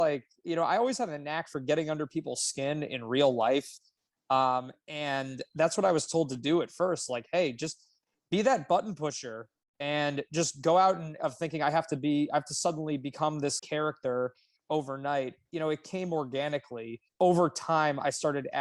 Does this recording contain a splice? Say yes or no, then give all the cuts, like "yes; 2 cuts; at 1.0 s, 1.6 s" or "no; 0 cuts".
yes; 3 cuts; at 11.2 s, 13.6 s, 17.1 s